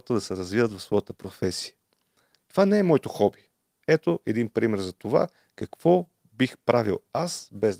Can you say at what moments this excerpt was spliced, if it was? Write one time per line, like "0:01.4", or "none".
0:03.8